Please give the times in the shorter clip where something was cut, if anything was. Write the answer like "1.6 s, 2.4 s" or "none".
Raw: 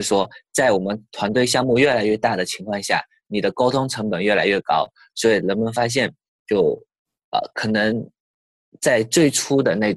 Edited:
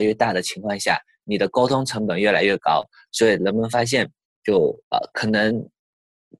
4.8 s